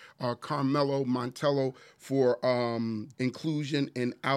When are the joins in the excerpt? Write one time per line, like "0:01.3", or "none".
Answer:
0:03.1